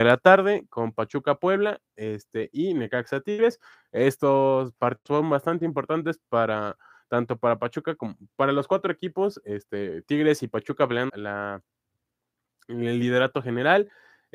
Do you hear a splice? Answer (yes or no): yes